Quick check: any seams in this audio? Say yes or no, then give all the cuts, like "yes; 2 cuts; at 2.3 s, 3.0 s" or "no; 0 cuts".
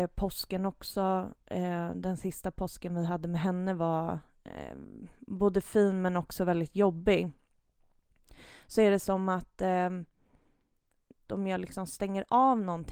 yes; 1 cut; at 11.3 s